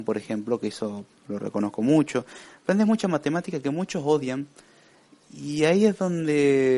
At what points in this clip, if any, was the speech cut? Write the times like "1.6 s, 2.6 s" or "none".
none